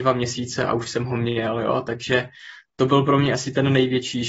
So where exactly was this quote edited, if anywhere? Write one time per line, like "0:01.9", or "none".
none